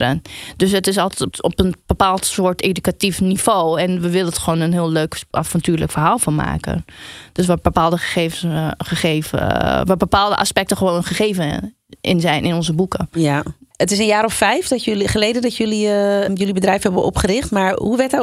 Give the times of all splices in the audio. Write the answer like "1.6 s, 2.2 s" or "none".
none